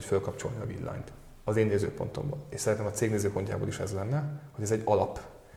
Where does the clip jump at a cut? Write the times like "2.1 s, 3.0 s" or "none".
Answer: none

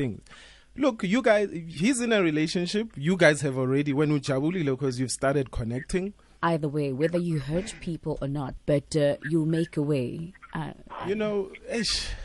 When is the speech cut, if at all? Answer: 6.4 s, 8.6 s

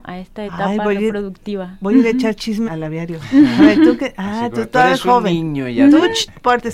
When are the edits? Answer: 2.6 s

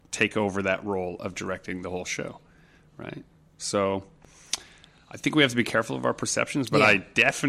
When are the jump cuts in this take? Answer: none

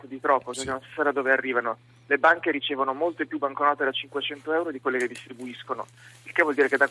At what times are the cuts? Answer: none

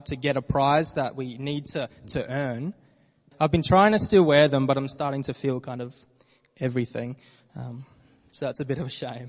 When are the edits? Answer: 3.3 s

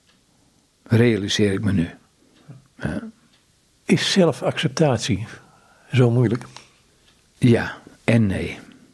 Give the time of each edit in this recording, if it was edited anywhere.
none

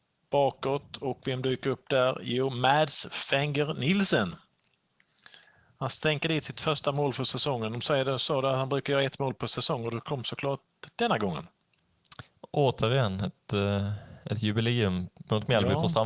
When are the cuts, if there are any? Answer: none

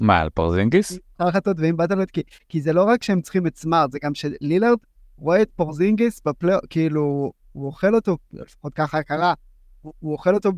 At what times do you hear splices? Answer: none

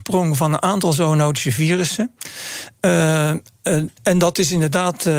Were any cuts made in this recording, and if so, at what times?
4.0 s

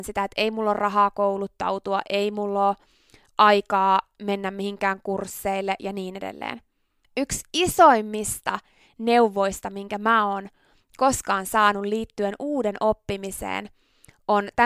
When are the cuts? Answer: 7.0 s

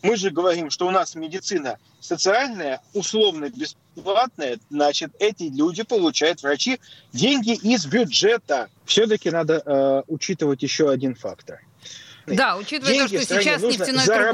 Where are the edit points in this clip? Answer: 8.8 s, 12.3 s

